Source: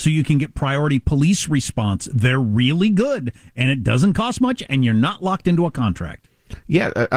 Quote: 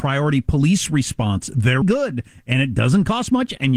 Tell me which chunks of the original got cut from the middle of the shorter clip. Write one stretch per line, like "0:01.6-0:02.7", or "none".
0:02.4-0:02.9